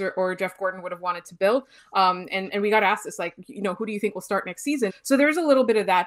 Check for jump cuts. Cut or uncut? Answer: cut